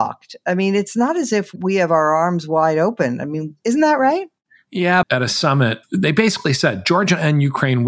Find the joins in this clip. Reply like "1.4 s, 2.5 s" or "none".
5.0 s

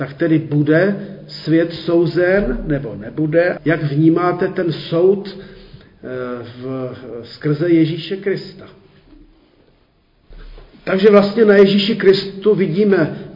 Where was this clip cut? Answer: 3.6 s

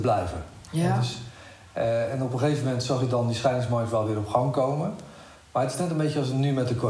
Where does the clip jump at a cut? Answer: none

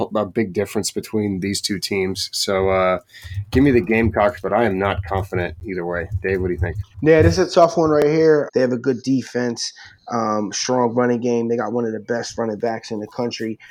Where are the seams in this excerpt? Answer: 6.9 s, 8.5 s

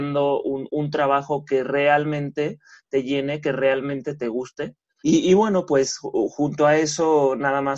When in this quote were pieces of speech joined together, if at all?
5.0 s

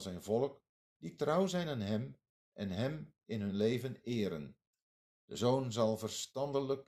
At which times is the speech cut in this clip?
5.1 s

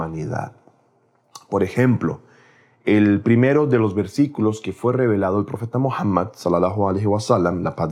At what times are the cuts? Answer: none

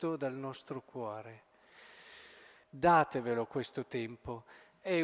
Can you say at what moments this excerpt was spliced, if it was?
2.6 s

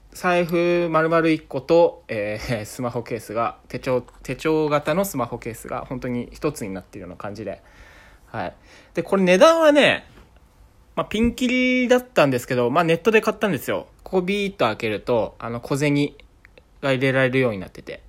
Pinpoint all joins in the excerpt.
13.9 s

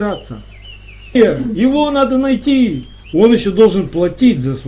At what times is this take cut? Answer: 1.2 s, 3.0 s

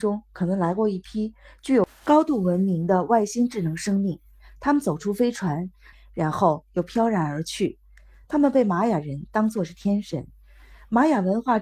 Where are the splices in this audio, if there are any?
5.9 s

